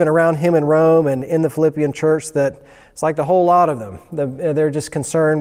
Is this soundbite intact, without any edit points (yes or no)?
yes